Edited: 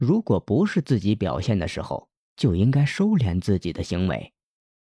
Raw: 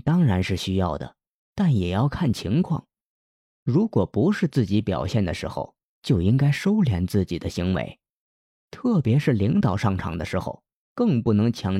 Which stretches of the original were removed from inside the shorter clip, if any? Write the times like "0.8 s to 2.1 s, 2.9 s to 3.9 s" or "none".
none